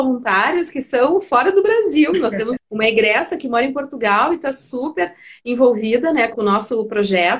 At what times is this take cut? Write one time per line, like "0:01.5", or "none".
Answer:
0:02.6
0:06.3